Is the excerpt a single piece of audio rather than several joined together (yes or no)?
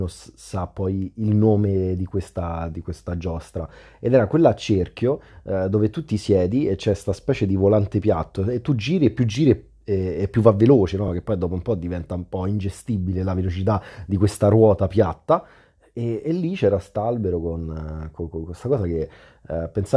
yes